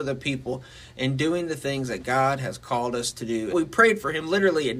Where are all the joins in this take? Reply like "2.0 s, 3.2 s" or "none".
3.5 s

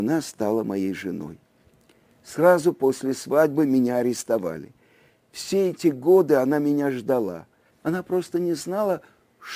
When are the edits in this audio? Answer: 7.7 s

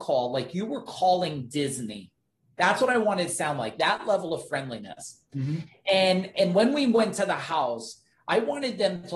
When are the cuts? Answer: none

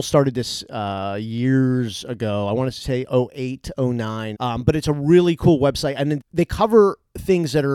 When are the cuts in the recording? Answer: 4.3 s, 6.2 s

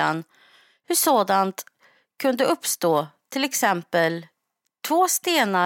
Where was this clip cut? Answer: none

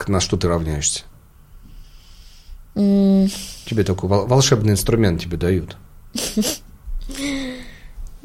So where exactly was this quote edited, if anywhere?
none

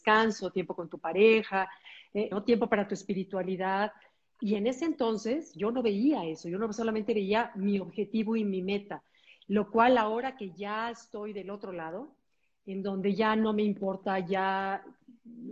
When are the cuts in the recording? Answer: 2.3 s

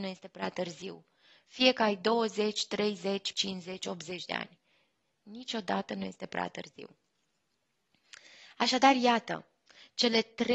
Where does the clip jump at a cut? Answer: 3.3 s

